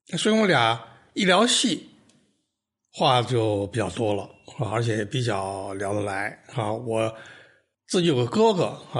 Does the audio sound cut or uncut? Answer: uncut